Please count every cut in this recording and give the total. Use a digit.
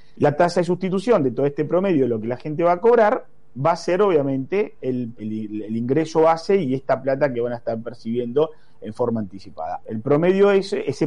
2